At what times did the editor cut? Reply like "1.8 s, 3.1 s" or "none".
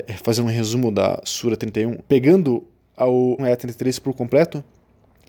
2.0 s, 3.4 s

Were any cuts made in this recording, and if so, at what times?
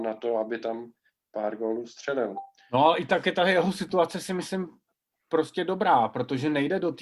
none

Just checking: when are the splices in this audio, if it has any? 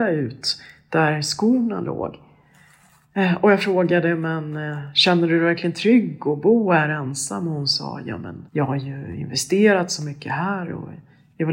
8.5 s

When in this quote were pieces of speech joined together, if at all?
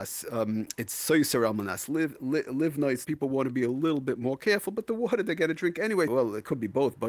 3.0 s, 6.1 s

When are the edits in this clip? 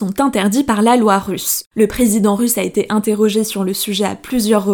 1.7 s

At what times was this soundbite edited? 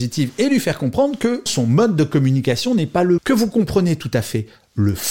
1.5 s, 3.2 s

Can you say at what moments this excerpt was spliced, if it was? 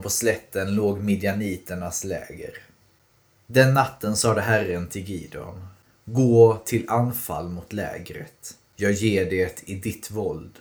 none

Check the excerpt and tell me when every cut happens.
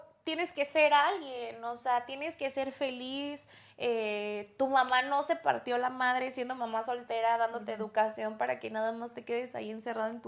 none

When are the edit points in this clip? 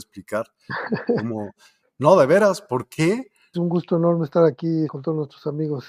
3.5 s, 4.9 s

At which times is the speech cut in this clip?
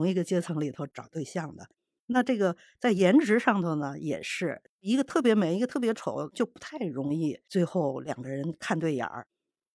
4.7 s

